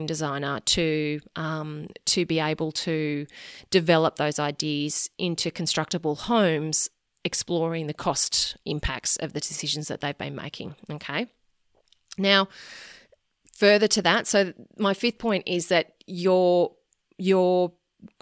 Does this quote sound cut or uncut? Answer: uncut